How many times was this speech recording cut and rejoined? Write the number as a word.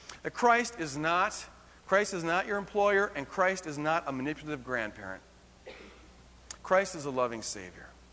zero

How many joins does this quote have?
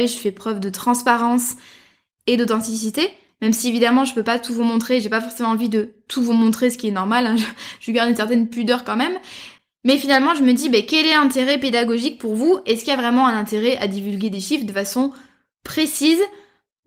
zero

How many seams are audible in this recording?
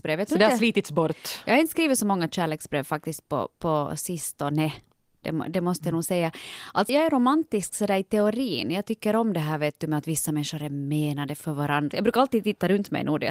two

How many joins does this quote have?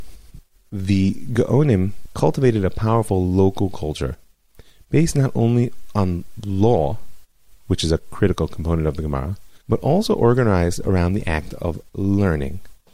one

